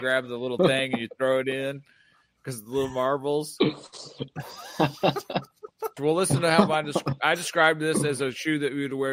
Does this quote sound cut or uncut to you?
cut